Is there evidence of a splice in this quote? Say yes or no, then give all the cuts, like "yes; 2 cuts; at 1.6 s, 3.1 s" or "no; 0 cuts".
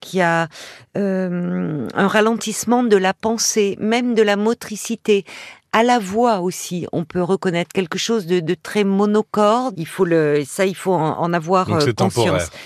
yes; 1 cut; at 9.7 s